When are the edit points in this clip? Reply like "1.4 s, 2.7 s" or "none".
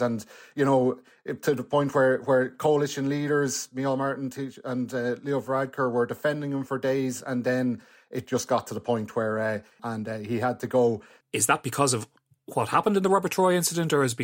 9.8 s, 11.2 s